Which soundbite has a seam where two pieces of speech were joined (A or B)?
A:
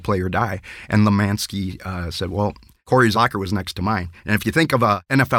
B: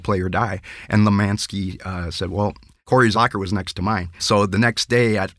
B